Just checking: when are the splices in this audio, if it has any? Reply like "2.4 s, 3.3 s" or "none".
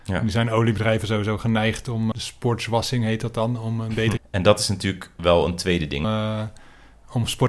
2.1 s, 4.2 s, 6.0 s